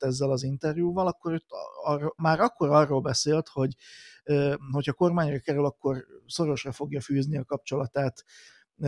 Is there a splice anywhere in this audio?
yes; 1 cut; at 2.2 s

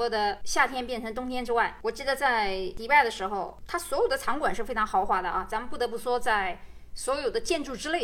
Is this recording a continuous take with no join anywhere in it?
yes; 0 cuts

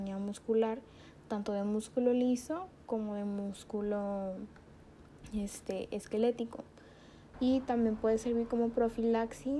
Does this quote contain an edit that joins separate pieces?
yes; 1 cut; at 7.3 s

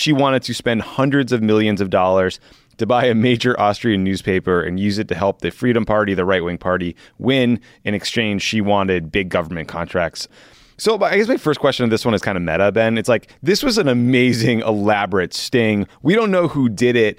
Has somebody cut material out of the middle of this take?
no; 0 cuts

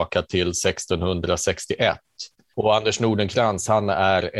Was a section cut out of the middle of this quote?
yes; 1 cut; at 2.5 s

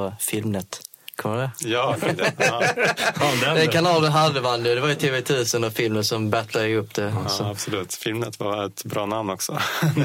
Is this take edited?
no; 0 cuts

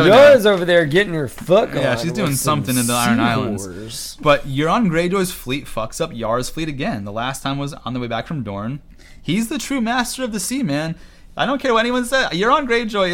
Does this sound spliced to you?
no; 0 cuts

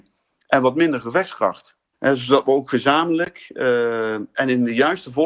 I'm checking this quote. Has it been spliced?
yes; 1 cut; at 1.9 s

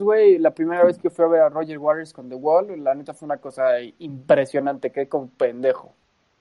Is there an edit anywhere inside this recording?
no; 0 cuts

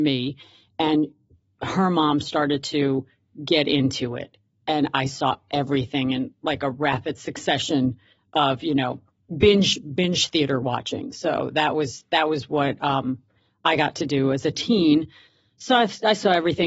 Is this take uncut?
yes; 0 cuts

